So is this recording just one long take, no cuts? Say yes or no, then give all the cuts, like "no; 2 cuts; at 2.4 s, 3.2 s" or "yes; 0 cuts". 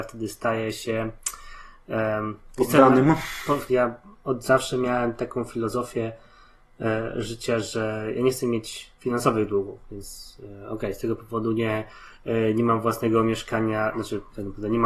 no; 2 cuts; at 3.7 s, 9.0 s